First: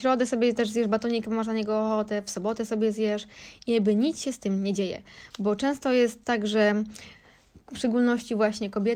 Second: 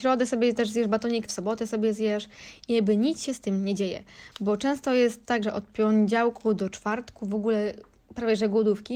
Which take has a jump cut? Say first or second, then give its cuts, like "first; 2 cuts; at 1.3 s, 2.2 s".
second; 2 cuts; at 1.3 s, 5.4 s